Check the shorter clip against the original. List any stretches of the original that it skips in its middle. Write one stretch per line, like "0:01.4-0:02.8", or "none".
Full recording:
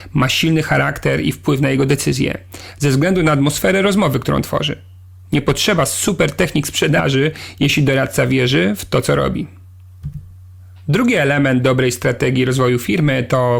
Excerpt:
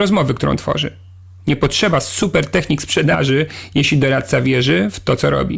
none